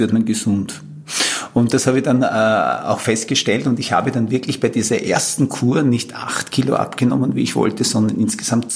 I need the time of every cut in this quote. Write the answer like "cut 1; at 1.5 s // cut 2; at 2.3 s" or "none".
none